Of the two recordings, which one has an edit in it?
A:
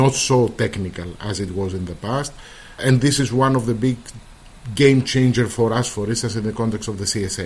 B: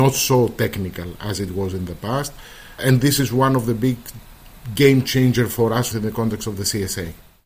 B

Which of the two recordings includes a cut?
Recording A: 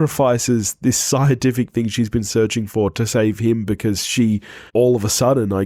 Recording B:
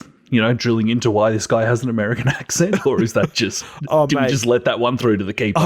A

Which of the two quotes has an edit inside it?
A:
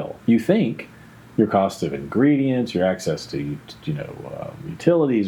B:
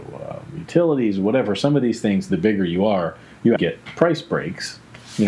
B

